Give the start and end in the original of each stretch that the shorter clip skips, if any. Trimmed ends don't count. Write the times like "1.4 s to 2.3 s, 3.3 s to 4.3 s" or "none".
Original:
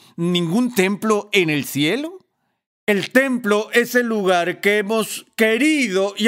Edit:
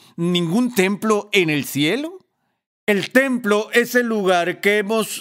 none